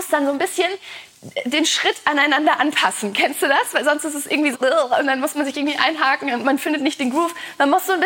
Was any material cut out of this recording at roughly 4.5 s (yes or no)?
yes